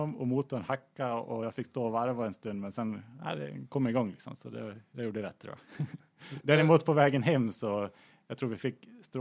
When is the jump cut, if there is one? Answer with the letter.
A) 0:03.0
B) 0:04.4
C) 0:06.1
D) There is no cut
D